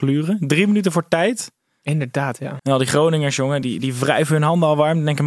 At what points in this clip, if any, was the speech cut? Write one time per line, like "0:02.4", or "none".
0:02.6
0:03.6